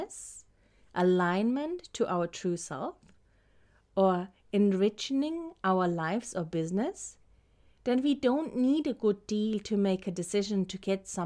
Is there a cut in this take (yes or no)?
no